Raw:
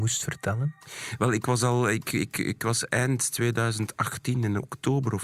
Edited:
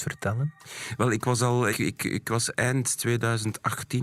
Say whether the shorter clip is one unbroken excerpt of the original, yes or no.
no